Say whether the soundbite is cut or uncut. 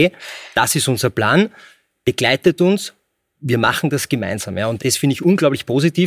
cut